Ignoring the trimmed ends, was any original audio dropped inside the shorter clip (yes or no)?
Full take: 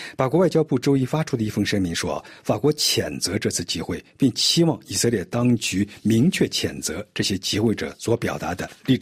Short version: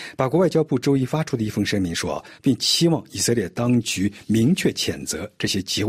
yes